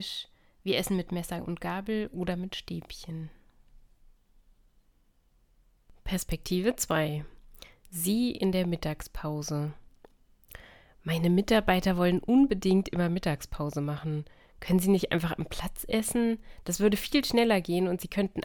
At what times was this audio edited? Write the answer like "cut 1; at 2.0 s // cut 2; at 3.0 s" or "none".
none